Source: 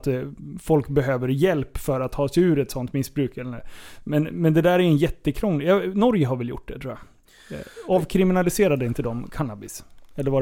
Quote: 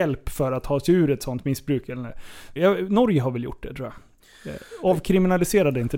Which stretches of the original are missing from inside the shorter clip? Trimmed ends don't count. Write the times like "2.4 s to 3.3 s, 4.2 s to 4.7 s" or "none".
4.0 s to 5.6 s